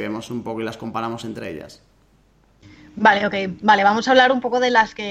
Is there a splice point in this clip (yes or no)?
no